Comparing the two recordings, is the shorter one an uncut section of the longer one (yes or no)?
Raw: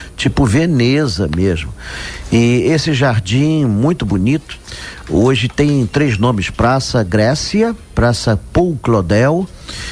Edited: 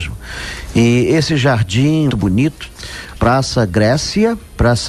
no